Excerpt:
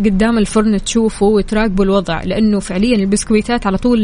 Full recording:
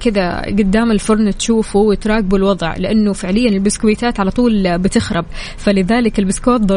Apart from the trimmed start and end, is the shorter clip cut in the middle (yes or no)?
no